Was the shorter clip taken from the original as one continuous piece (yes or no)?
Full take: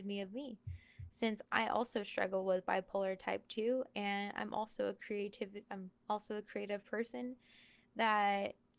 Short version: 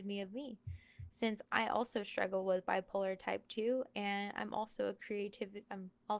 yes